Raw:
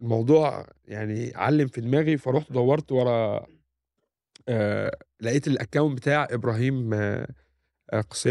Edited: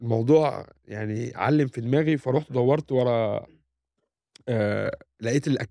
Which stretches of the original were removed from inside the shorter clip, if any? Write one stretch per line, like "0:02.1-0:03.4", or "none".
none